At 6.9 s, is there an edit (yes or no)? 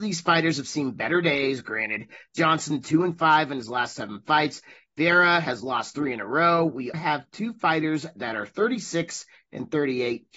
yes